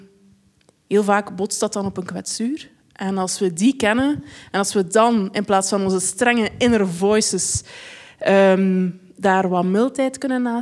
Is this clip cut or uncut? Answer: uncut